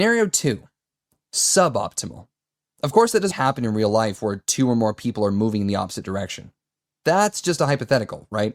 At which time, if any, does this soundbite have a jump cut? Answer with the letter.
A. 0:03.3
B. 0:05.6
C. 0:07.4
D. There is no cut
A